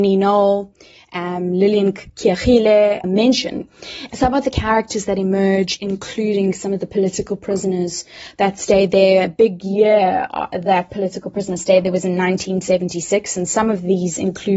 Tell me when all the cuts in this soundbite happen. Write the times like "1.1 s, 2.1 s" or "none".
3.0 s, 4.1 s